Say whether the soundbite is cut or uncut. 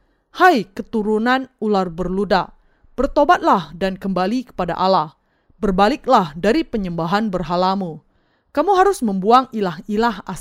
uncut